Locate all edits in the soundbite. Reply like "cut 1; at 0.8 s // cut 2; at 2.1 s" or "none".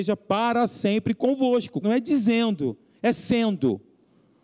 cut 1; at 1.8 s